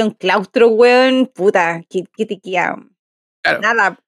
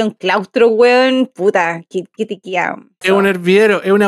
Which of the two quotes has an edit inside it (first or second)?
second